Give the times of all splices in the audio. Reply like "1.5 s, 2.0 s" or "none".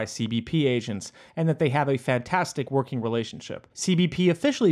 3.7 s